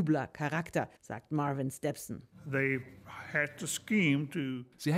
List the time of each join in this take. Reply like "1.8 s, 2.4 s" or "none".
1.0 s